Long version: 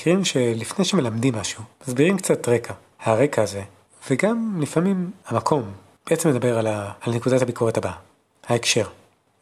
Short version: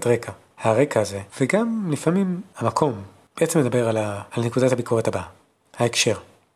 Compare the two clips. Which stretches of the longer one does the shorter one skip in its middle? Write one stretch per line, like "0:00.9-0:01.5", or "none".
0:03.7-0:04.0

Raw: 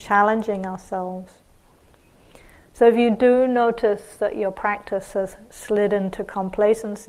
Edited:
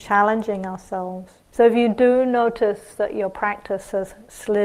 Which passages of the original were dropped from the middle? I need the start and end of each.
0:01.5-0:02.7

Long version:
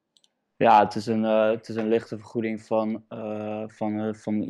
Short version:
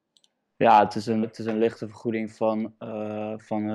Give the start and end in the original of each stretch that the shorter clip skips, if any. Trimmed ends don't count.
0:01.2-0:01.5

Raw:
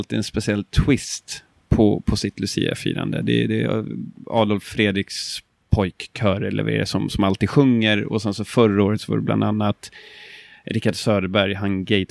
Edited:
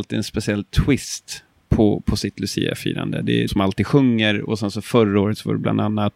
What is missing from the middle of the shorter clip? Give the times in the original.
0:03.5-0:07.1

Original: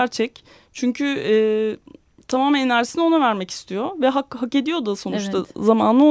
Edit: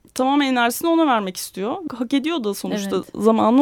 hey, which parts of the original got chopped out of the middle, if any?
0:04.0-0:04.3

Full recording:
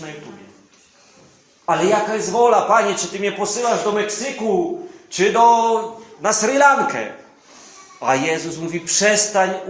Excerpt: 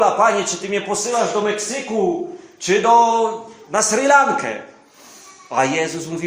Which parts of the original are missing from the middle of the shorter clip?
none

